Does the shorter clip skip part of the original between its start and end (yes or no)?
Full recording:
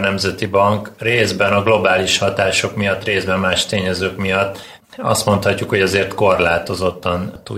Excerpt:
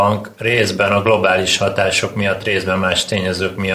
no